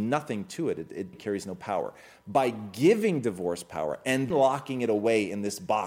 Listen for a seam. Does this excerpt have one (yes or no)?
yes